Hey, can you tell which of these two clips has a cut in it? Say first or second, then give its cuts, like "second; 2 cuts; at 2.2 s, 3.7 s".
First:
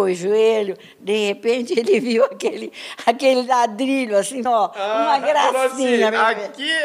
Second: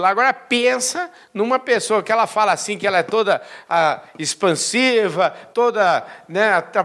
first; 1 cut; at 4.5 s